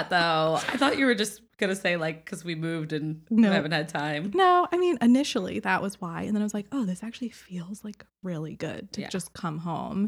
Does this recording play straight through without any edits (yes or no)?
yes